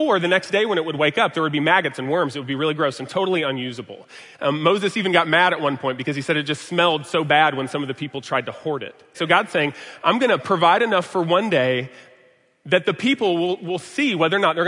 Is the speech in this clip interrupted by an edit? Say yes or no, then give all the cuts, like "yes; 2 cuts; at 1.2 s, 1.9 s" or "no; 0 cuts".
yes; 1 cut; at 9.1 s